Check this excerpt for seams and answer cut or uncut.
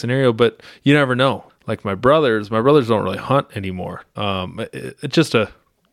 cut